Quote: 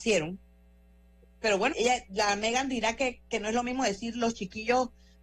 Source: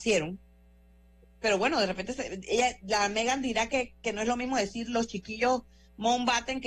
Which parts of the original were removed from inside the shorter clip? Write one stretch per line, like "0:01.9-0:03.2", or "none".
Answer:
0:01.7-0:02.4